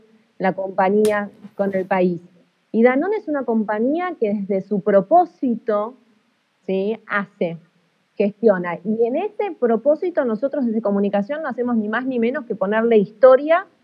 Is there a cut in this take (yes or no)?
no